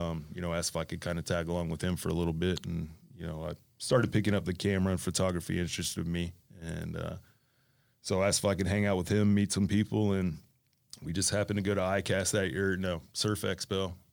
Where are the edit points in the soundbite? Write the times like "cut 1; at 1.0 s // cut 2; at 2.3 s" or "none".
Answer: none